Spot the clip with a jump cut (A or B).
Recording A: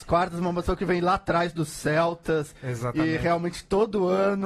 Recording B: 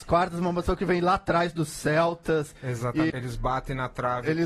B